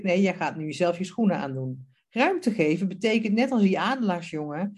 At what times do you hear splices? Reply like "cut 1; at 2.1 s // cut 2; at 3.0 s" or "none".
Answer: cut 1; at 2.0 s